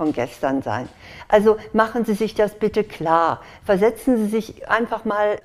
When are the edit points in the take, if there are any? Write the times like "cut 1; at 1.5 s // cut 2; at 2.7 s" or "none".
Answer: none